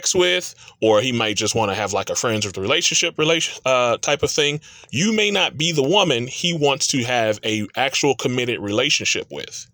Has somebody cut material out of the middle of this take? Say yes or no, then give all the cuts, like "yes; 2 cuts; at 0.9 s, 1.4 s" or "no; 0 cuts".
no; 0 cuts